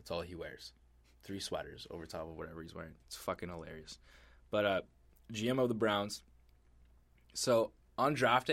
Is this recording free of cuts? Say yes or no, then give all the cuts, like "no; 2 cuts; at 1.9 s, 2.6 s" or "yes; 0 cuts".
yes; 0 cuts